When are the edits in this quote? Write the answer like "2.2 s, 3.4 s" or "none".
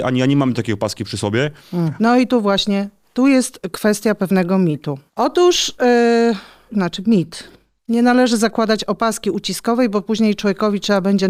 2.0 s, 5.1 s, 6.7 s